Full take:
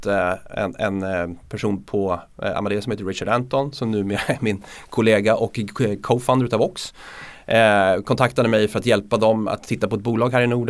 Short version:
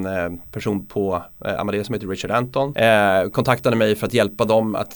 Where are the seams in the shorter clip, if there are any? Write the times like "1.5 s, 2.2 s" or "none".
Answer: 2.7 s